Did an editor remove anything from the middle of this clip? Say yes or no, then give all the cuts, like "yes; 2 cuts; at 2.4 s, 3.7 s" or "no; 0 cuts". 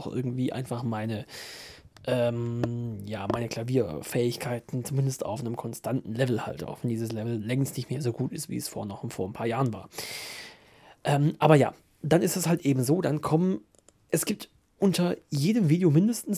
no; 0 cuts